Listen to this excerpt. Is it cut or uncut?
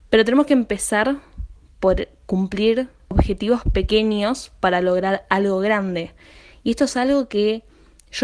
uncut